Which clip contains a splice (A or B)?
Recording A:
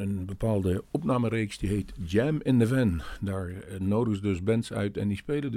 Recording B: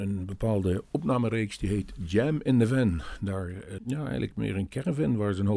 B